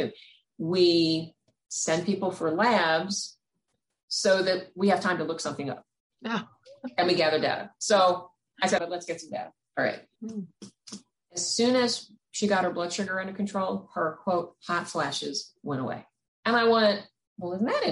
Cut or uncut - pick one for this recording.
cut